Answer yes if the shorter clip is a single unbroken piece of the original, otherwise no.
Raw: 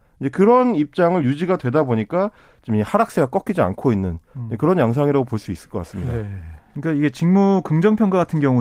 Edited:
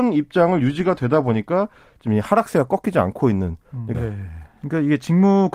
no